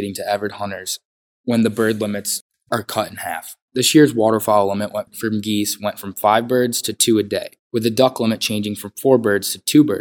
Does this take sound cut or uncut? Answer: cut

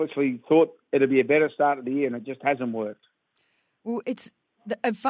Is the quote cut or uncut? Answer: uncut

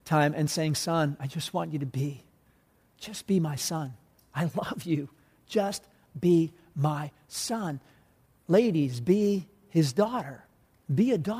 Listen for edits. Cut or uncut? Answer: uncut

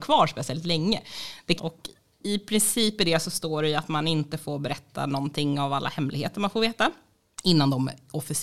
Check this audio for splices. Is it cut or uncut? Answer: cut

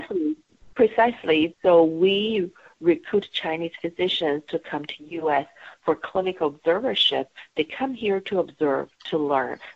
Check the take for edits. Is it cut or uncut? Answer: cut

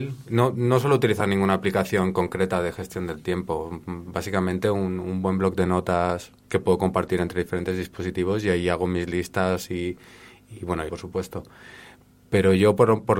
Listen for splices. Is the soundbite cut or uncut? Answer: cut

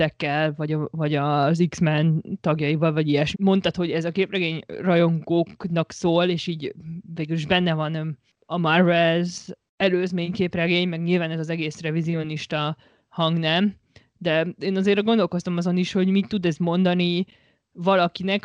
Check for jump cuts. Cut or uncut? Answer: cut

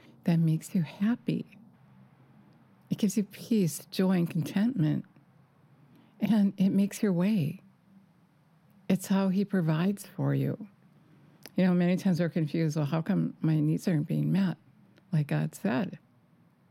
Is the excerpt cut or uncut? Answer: uncut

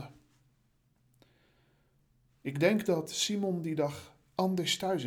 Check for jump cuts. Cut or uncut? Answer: uncut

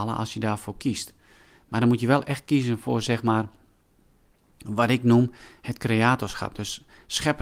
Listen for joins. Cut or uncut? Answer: uncut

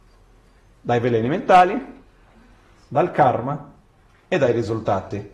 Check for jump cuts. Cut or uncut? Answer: uncut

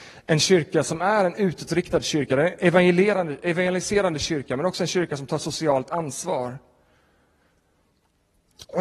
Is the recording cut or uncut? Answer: uncut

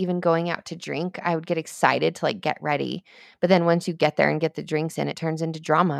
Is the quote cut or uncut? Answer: uncut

